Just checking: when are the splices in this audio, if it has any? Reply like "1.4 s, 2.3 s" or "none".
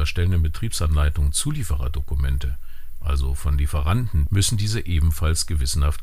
4.3 s